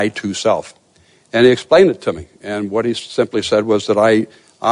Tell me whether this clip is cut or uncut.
uncut